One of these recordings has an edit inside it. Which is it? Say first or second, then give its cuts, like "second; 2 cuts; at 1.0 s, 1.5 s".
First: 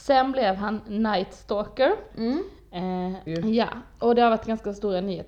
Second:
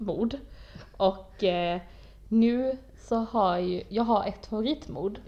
first; 2 cuts; at 2.1 s, 3.3 s